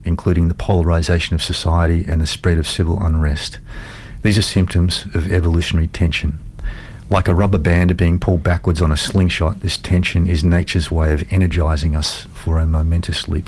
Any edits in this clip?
no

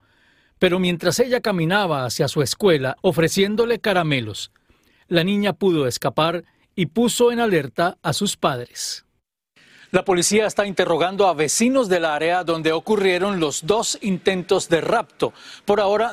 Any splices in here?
yes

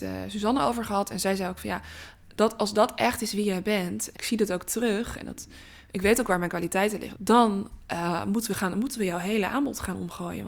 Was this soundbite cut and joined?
yes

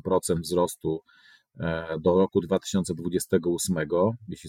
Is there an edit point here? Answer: no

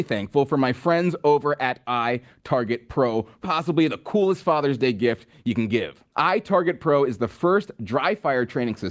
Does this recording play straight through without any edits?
no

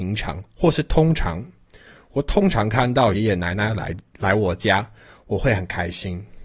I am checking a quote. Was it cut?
yes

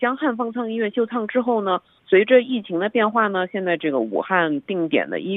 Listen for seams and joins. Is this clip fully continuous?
no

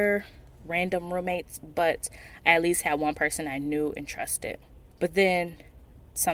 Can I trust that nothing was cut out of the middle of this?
no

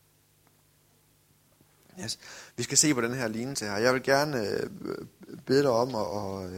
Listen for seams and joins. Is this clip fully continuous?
yes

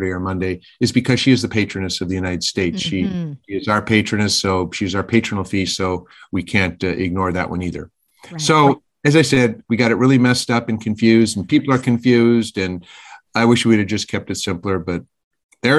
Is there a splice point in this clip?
no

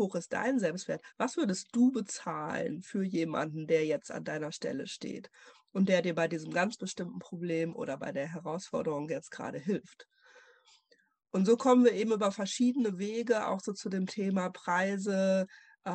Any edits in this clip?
no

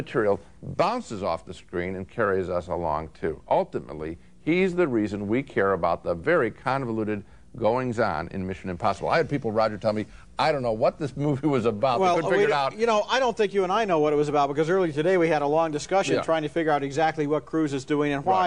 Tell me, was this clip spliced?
no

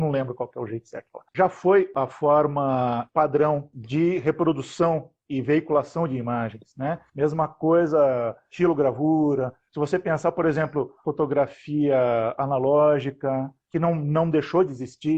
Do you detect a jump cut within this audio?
no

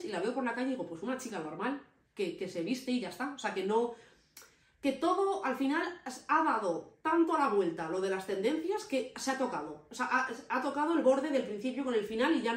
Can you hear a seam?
no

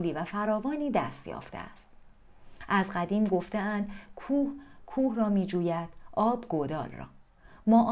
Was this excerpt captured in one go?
yes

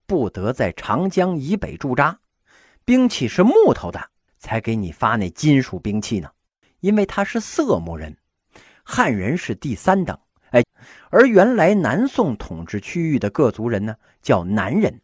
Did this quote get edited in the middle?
yes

